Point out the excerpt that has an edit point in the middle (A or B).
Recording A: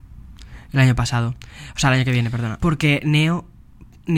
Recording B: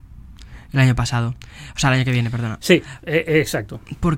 A